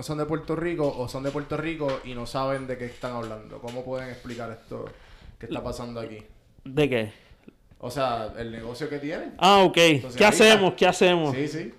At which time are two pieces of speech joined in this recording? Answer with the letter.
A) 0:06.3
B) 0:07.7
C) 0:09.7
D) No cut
D